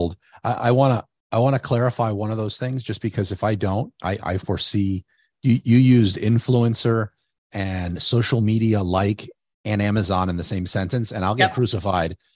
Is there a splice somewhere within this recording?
no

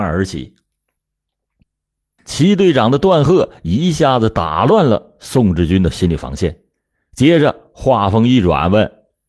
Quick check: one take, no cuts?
yes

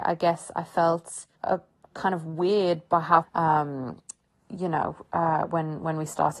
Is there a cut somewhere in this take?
yes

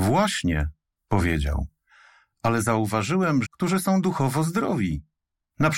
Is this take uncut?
no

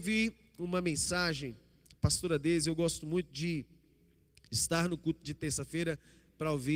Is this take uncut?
yes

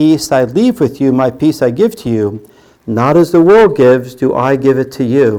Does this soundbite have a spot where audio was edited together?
no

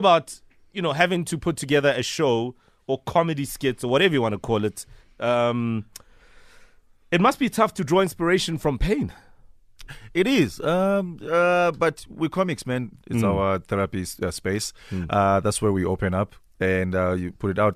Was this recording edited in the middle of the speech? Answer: yes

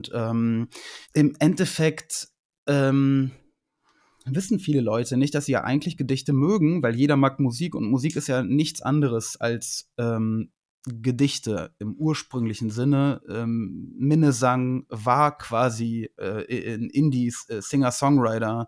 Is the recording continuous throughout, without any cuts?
no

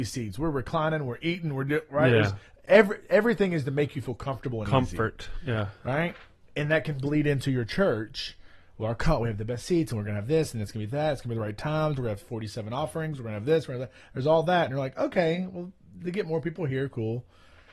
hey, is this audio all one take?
yes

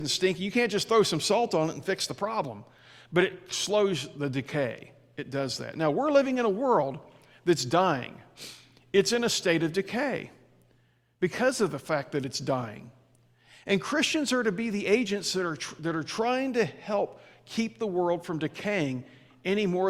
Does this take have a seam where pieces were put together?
no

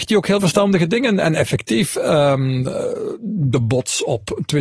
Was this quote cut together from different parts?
no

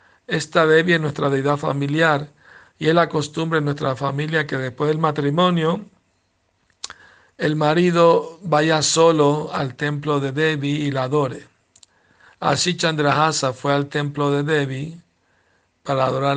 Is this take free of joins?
yes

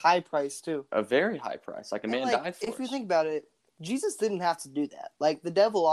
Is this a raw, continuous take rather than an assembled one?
yes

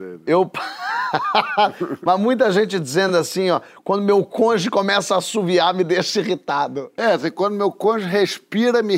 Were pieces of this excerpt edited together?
no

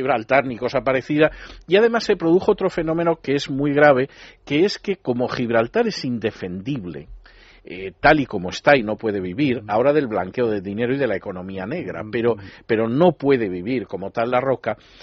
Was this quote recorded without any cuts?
yes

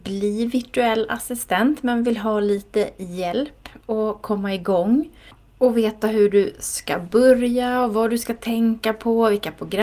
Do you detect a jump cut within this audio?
no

